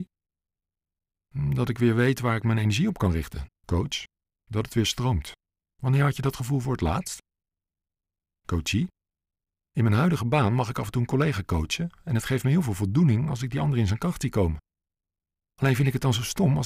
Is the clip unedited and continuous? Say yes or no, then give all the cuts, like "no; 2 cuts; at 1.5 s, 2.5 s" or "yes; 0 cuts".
no; 1 cut; at 3.5 s